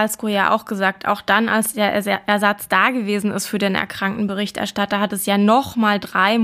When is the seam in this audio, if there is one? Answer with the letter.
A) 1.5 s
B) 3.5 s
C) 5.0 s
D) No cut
D